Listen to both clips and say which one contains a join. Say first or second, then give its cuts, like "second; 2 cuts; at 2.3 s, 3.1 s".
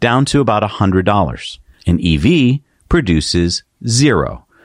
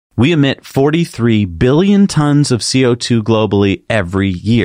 first; 1 cut; at 1.7 s